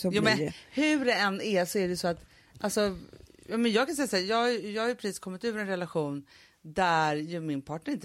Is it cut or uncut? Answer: uncut